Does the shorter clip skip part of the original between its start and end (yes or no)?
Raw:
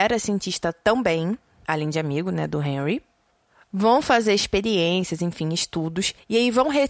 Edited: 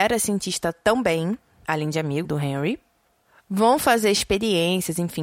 yes